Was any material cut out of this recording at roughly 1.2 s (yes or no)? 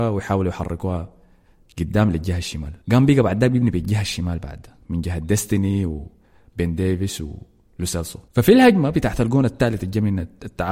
no